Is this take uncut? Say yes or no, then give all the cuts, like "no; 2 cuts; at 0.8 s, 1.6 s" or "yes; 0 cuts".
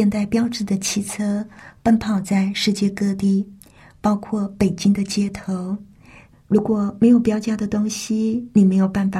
no; 1 cut; at 6.3 s